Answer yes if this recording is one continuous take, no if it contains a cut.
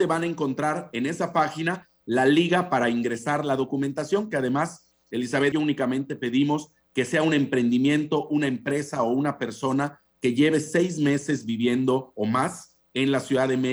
no